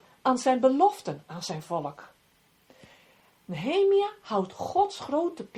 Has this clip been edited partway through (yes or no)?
no